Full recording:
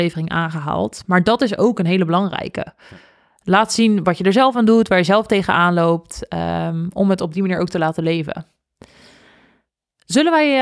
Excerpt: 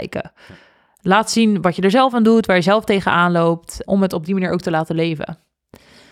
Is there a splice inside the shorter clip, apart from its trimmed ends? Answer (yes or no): yes